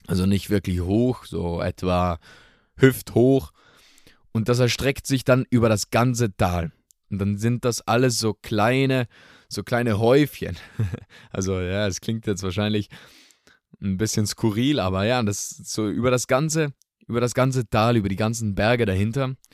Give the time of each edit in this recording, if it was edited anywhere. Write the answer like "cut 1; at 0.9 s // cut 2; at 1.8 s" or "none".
none